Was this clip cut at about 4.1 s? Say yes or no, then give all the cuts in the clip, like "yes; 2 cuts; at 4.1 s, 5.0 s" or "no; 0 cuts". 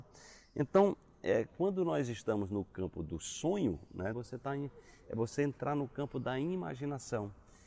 yes; 1 cut; at 4.1 s